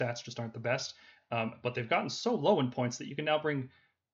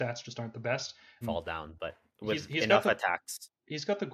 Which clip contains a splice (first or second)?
second